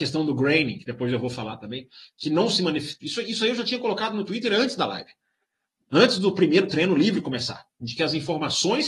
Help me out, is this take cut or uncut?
cut